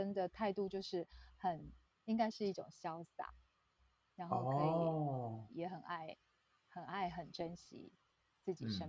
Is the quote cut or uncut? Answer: cut